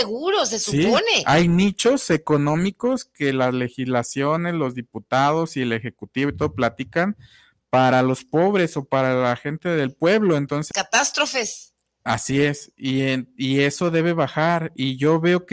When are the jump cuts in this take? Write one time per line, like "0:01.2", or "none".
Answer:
0:10.7